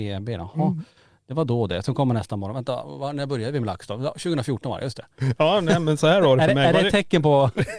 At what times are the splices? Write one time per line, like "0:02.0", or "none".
none